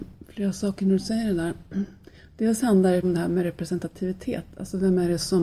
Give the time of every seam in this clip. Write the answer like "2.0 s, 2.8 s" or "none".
3.0 s